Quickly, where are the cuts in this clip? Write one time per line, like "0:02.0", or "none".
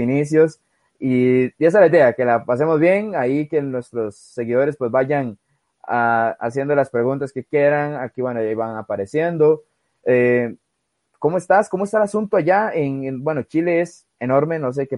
none